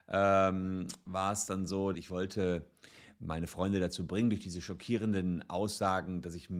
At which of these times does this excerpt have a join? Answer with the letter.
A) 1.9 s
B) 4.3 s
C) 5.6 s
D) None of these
A